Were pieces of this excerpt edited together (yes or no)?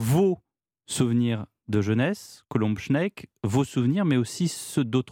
no